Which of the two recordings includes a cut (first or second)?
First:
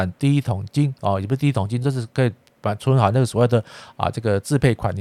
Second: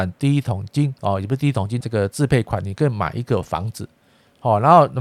second